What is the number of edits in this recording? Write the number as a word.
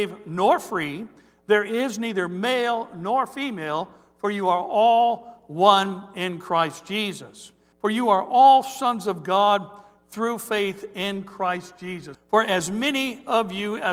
two